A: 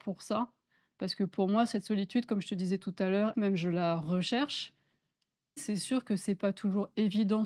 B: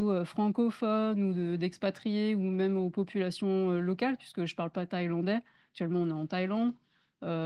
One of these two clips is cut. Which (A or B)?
A